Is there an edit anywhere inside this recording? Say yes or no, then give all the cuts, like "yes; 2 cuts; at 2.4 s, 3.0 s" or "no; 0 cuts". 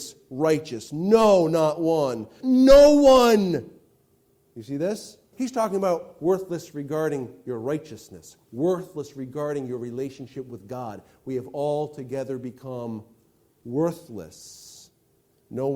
yes; 2 cuts; at 2.4 s, 5.3 s